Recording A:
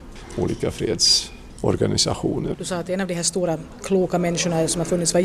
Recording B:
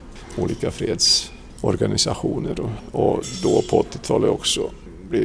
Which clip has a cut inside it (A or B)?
A